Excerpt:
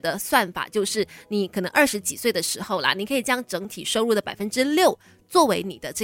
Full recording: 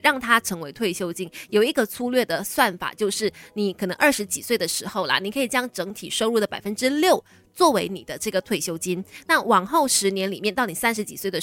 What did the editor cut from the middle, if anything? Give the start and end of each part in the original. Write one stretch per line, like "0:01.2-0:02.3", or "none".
none